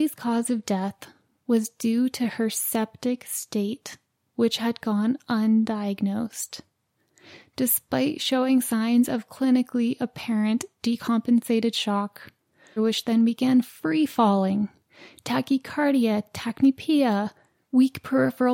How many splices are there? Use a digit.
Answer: 1